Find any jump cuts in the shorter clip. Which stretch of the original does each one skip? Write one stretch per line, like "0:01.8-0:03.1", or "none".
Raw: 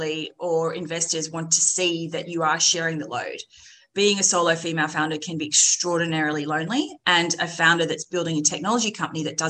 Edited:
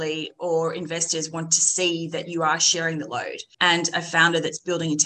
0:03.5-0:07.0